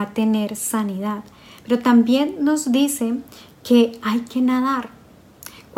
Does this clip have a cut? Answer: no; 0 cuts

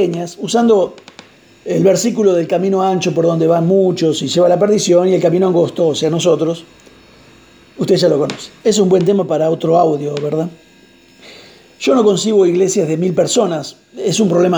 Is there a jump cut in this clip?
yes; 1 cut; at 8.6 s

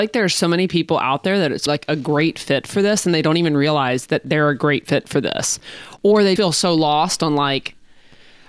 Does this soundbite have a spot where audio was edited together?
yes; 2 cuts; at 1.7 s, 6.4 s

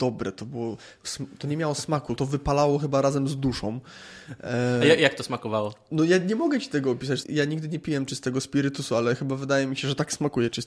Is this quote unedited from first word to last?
no; 2 cuts; at 2.2 s, 7.2 s

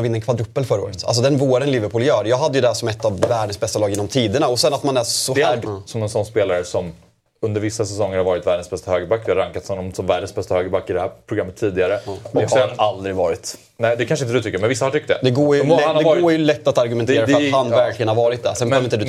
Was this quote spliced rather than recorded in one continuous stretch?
yes; 1 cut; at 5.6 s

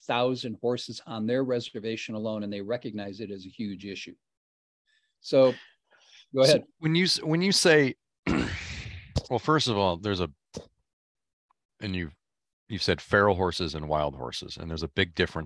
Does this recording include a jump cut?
no; 0 cuts

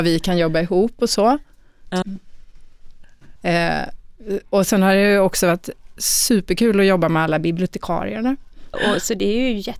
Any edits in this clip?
yes; 3 cuts; at 2.0 s, 3.4 s, 8.7 s

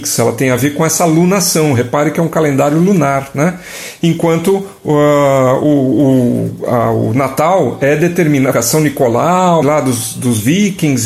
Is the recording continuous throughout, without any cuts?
no; 2 cuts; at 8.5 s, 9.6 s

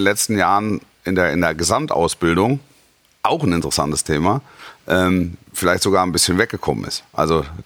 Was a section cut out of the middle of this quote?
no; 0 cuts

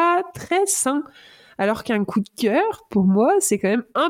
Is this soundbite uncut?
yes; 0 cuts

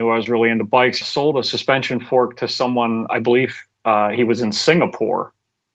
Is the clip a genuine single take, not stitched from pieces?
no; 1 cut; at 1.0 s

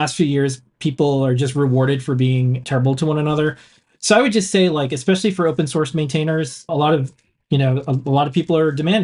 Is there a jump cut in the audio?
yes; 2 cuts; at 2.6 s, 6.7 s

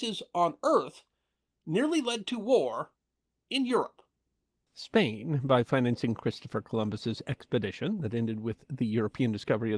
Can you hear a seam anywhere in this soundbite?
yes; 1 cut; at 4.7 s

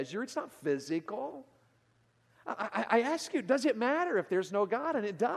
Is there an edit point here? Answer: no; 0 cuts

